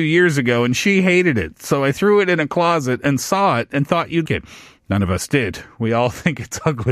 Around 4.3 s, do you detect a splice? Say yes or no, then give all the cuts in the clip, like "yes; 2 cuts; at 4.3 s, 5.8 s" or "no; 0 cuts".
yes; 1 cut; at 4.3 s